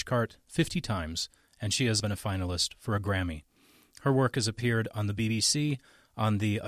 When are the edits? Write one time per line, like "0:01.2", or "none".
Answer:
0:02.0